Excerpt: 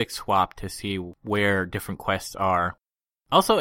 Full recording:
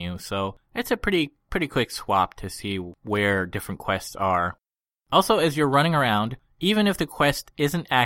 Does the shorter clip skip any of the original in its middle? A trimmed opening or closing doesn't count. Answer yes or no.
no